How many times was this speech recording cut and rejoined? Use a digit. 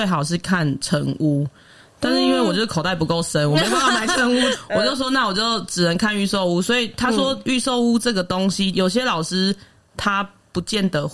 2